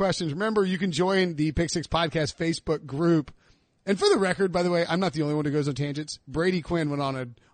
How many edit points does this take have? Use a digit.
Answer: 0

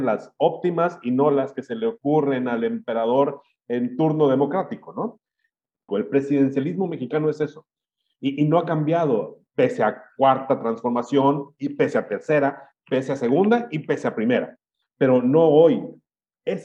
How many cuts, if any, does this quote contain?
2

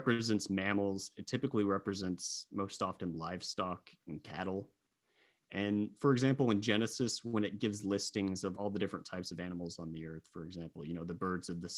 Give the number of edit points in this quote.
1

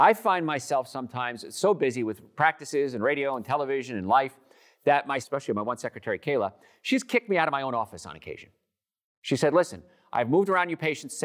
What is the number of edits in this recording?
1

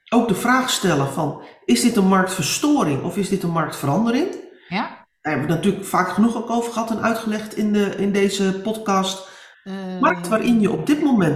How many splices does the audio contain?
1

